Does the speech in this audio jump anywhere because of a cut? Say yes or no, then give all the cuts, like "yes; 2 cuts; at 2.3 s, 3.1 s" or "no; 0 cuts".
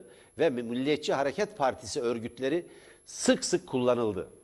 no; 0 cuts